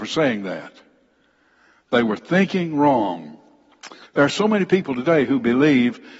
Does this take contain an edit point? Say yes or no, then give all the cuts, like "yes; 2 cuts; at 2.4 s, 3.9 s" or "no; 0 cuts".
yes; 1 cut; at 4.0 s